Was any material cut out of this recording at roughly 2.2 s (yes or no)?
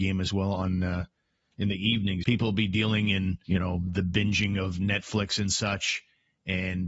yes